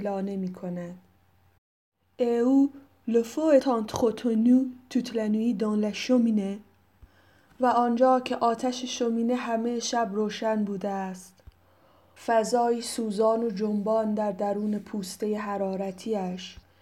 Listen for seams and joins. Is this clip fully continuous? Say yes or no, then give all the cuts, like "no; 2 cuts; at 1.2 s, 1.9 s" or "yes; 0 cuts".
no; 2 cuts; at 3.6 s, 12.2 s